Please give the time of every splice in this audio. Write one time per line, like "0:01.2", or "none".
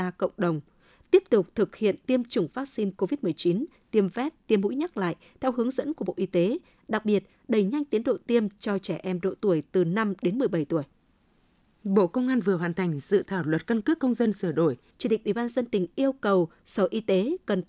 0:14.9